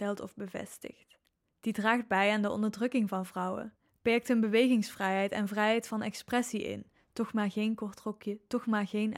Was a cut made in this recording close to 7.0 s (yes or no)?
no